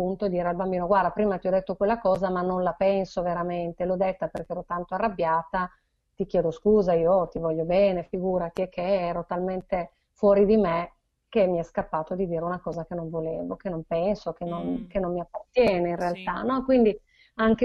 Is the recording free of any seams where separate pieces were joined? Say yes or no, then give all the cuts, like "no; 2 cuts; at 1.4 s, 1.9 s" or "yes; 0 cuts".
yes; 0 cuts